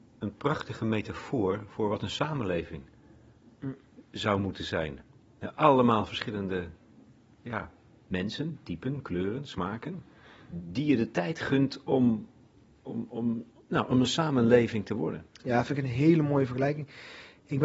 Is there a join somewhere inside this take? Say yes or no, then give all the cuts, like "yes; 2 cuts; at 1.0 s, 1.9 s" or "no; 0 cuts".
no; 0 cuts